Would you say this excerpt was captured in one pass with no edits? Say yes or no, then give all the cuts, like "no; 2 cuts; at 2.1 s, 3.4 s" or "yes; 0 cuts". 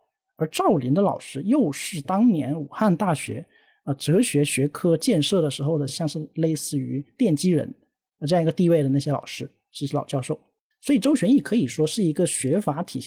yes; 0 cuts